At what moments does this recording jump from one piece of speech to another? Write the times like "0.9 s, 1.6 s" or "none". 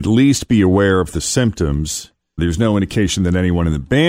2.4 s